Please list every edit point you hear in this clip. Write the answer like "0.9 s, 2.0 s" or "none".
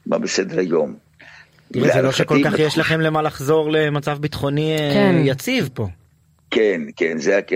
none